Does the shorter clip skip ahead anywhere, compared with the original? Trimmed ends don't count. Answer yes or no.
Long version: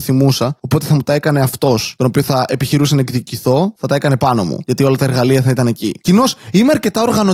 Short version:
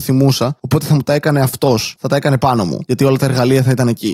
yes